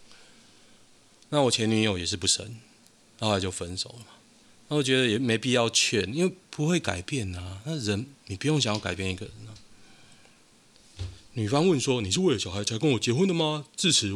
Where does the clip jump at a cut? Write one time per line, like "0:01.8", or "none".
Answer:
none